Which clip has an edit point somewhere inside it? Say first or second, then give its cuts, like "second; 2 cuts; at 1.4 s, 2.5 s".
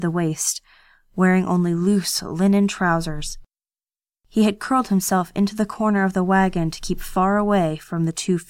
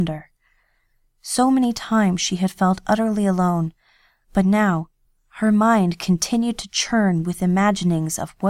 second; 1 cut; at 4.2 s